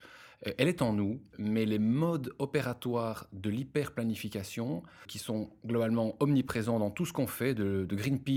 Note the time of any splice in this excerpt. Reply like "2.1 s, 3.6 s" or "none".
none